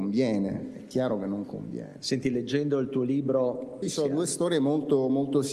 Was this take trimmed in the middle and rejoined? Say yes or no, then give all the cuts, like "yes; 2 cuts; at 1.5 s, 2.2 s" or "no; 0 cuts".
yes; 1 cut; at 3.8 s